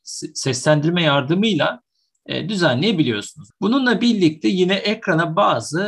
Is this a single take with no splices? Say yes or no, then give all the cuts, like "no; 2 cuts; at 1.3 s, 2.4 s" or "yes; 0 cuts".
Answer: no; 1 cut; at 3.5 s